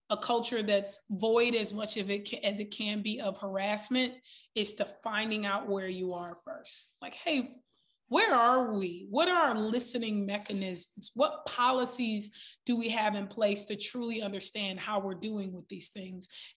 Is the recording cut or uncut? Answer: uncut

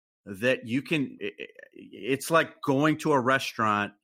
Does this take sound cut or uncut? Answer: cut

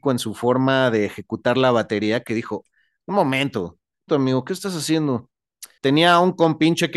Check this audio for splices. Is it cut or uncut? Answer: cut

